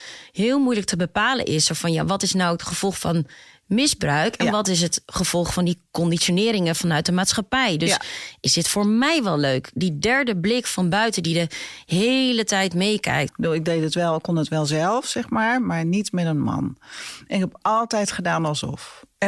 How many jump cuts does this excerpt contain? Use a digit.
1